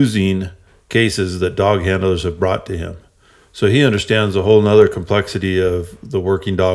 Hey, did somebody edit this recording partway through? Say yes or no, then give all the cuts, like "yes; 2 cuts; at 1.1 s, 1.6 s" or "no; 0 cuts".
no; 0 cuts